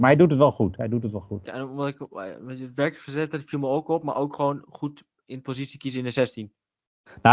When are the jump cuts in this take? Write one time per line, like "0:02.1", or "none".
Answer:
0:01.5